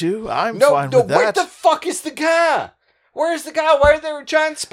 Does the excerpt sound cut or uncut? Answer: uncut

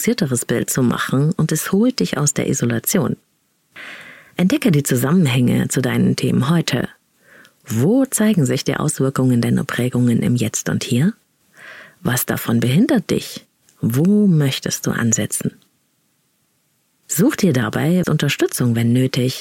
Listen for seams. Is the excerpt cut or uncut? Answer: cut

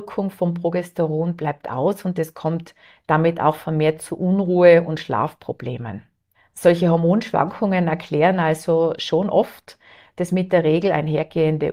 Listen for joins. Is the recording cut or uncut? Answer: uncut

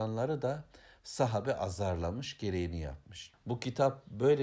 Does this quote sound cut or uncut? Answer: cut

